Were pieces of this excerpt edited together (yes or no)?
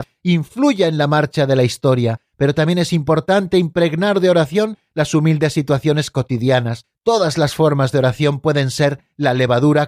no